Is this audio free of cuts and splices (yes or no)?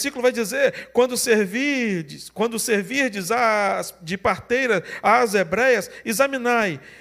yes